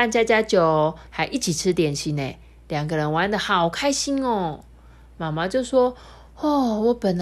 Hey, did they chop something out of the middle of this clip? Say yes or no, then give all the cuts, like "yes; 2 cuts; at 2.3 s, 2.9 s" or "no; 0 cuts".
yes; 1 cut; at 1.1 s